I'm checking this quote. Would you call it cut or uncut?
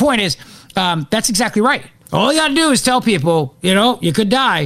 cut